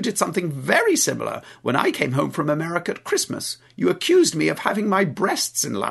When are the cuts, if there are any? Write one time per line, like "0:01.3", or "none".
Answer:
none